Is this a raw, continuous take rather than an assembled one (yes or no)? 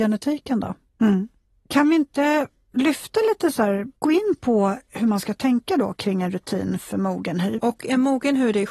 no